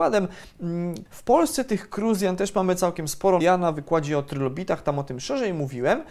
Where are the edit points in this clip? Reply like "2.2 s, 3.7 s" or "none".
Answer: 1.1 s, 3.4 s

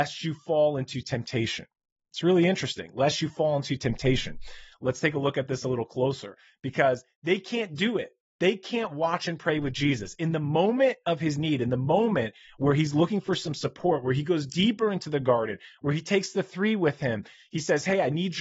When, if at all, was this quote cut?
none

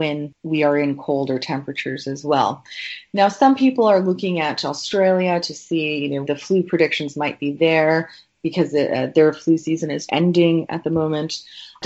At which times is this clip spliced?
6.2 s, 10.1 s

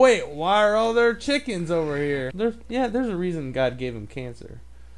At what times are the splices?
2.3 s

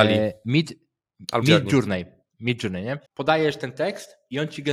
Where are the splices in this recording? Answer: 1.4 s, 3.1 s

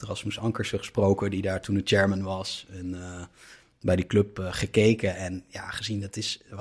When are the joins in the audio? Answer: none

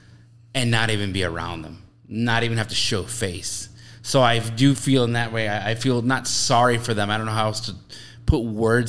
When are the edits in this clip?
none

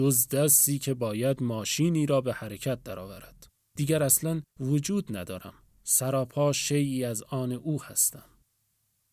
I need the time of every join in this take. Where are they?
3.6 s

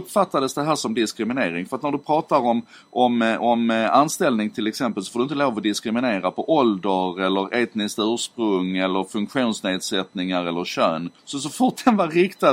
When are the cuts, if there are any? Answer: 11.2 s

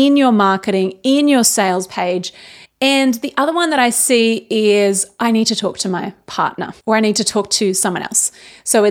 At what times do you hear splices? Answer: 2.6 s, 6.8 s

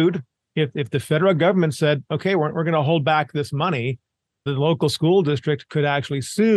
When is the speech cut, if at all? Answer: 4.5 s

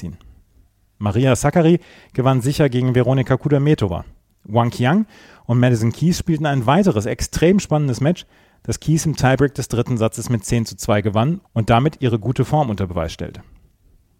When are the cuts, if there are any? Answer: none

